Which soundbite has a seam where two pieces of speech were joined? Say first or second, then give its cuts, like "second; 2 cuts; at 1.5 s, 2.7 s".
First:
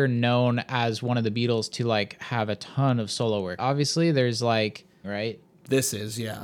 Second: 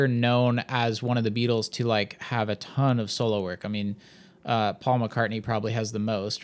first; 2 cuts; at 3.6 s, 5.0 s